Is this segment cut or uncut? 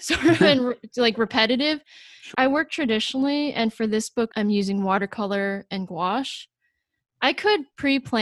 cut